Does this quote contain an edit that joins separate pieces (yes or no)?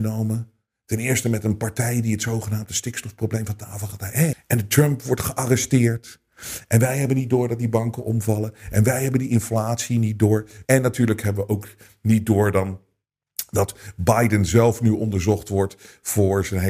yes